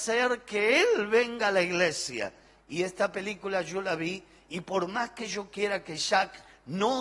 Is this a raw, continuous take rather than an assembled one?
yes; 0 cuts

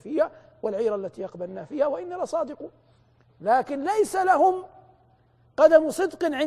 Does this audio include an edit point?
no; 0 cuts

